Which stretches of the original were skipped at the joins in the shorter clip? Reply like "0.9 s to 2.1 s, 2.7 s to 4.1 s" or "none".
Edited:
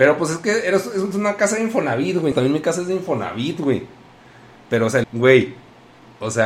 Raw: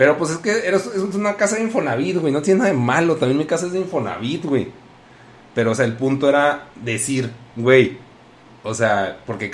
2.3 s to 3.2 s, 5.9 s to 7.5 s